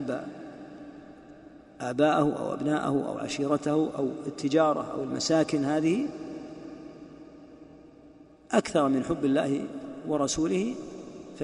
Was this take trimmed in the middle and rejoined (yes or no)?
no